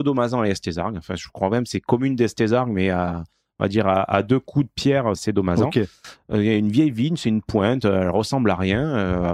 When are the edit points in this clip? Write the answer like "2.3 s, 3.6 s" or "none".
5.2 s